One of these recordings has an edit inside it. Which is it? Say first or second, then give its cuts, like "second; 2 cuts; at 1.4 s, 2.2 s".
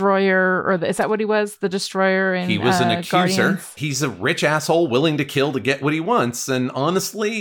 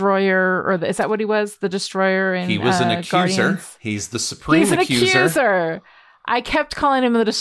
first; 1 cut; at 3.8 s